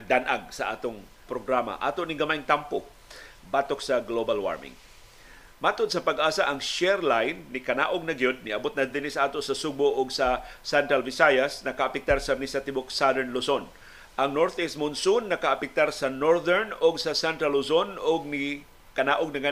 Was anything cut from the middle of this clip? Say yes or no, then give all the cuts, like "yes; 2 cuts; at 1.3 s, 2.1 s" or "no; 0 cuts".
yes; 1 cut; at 1.3 s